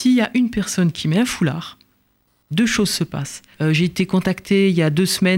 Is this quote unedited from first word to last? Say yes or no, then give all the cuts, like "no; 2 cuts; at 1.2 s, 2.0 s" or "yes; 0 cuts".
no; 1 cut; at 3.5 s